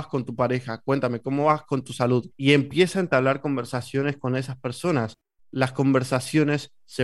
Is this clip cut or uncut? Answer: cut